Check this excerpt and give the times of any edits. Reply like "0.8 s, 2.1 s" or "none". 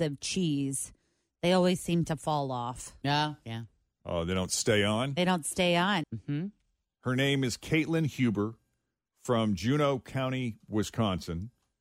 6.0 s